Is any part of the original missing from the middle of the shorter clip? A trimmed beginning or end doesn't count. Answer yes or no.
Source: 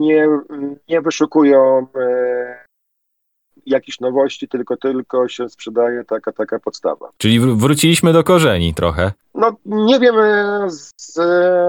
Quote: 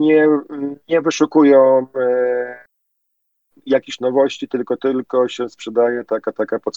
no